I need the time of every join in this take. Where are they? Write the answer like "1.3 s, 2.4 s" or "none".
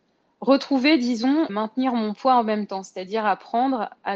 1.5 s

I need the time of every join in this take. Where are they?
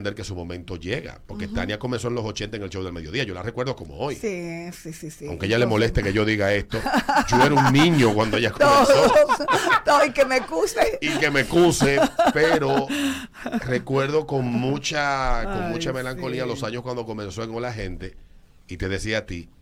none

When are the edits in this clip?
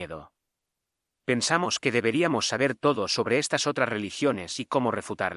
none

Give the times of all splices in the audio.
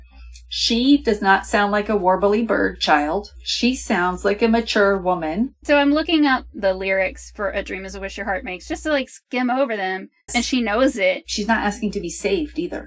5.6 s, 10.3 s

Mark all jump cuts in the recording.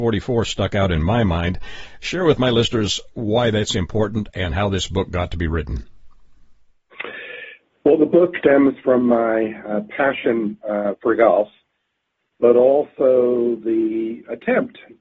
8.4 s

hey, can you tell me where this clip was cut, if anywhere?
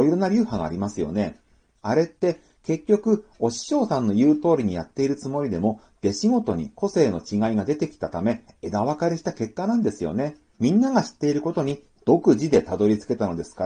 10.5 s

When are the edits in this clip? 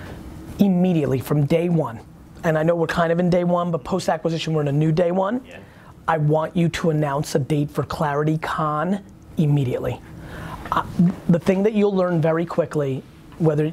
none

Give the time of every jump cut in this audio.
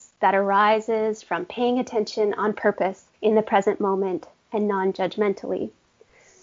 3.1 s

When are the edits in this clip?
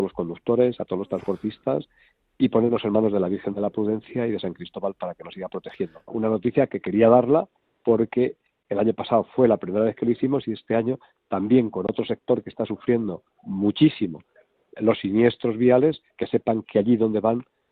6.1 s, 16.1 s

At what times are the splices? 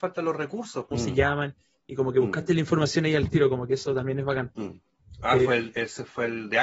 0.9 s

